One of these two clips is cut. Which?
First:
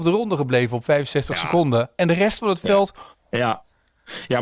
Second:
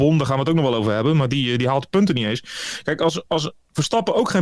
first; 1 cut; at 3.1 s

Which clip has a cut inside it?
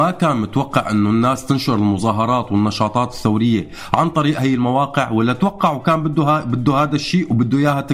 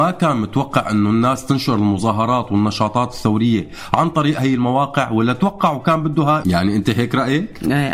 second; 1 cut; at 6.4 s

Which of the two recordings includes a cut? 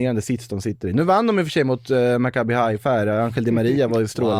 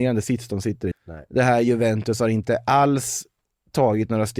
second; 1 cut; at 0.9 s

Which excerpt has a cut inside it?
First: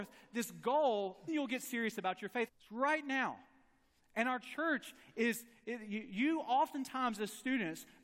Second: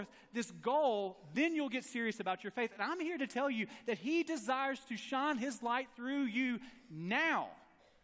first; 2 cuts; at 1.3 s, 2.5 s

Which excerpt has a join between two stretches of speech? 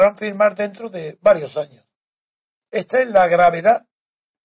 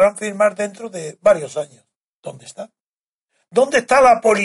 second; 1 cut; at 2.1 s

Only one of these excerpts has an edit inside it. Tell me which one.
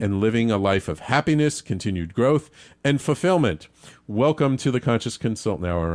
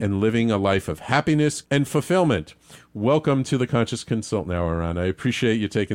second; 1 cut; at 1.6 s

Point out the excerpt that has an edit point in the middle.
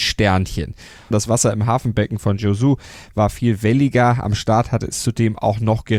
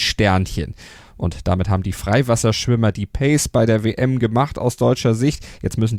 first; 1 cut; at 1.1 s

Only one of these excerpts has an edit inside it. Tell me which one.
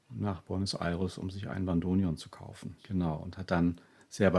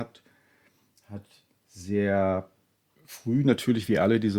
first; 1 cut; at 2.8 s

